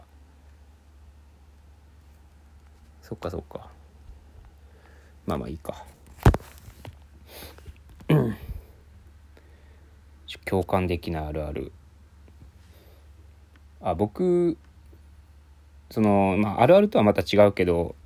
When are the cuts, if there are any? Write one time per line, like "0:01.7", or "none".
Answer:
none